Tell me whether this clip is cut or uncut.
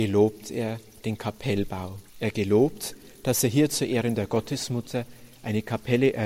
cut